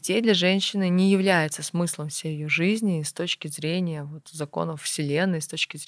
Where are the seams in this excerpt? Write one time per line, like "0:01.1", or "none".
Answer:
none

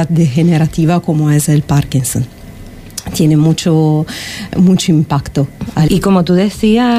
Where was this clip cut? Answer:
0:04.5
0:05.9

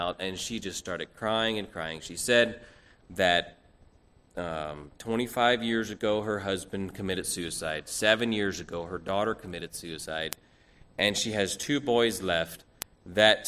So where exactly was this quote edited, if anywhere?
none

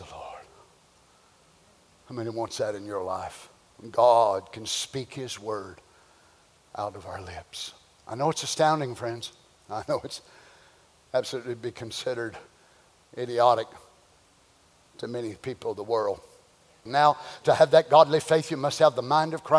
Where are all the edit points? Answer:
0:16.9

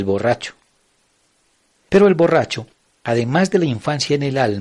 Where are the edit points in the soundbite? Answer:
none

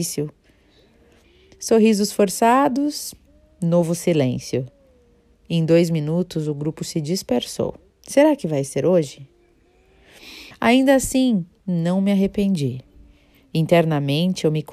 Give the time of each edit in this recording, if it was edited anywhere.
0:07.9
0:10.5

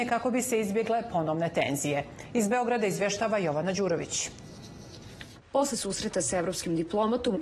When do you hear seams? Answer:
0:05.4

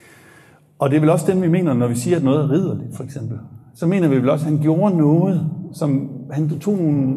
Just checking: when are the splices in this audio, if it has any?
none

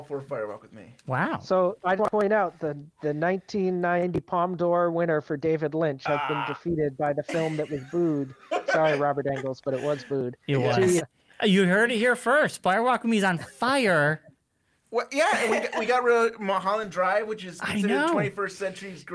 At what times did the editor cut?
0:02.0
0:11.0

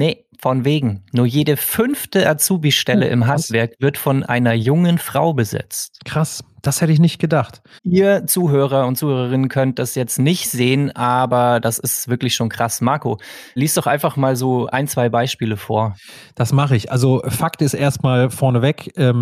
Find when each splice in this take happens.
0:07.8
0:13.6

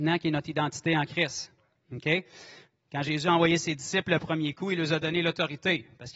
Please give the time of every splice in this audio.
none

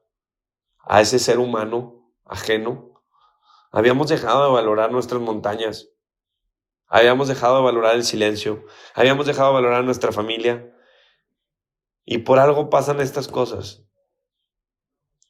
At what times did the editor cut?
none

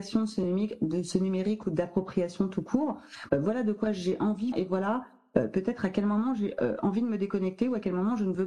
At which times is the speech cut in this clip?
0:03.3
0:04.5

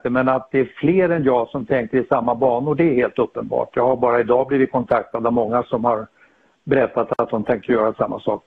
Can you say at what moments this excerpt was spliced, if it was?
none

